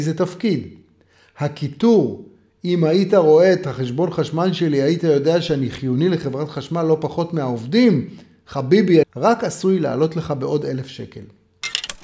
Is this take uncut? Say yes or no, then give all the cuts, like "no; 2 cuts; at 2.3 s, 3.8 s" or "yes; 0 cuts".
no; 1 cut; at 9.0 s